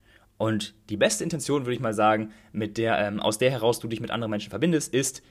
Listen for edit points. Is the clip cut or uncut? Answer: uncut